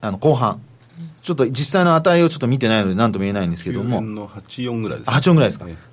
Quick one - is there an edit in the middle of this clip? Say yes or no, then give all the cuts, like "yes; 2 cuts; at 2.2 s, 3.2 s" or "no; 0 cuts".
yes; 1 cut; at 1.2 s